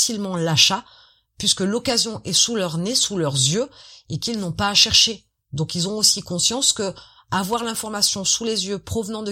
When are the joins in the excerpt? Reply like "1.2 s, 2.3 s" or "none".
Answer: none